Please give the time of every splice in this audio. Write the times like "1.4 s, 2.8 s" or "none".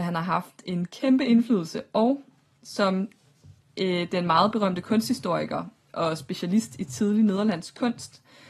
none